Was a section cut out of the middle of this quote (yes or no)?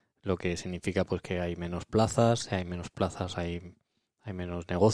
no